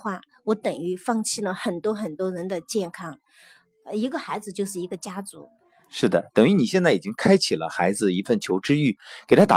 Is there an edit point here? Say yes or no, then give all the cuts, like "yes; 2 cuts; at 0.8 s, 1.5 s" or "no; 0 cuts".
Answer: no; 0 cuts